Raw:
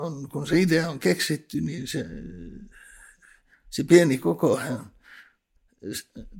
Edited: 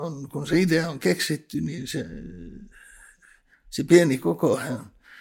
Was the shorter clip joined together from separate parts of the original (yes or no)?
no